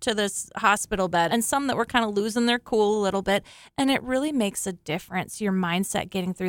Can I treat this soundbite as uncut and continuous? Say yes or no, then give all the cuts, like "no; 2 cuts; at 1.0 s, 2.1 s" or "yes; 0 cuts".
no; 1 cut; at 1.3 s